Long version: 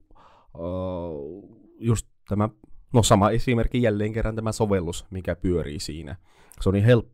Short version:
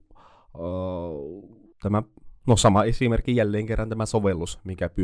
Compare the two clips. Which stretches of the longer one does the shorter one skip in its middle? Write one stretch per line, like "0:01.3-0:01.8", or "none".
0:01.7-0:02.2